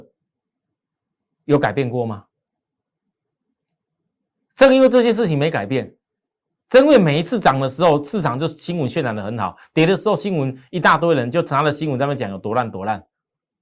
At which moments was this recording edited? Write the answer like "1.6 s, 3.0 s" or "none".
none